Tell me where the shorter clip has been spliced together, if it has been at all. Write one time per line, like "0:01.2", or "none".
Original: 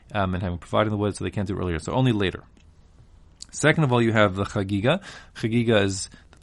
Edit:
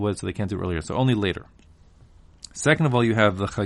none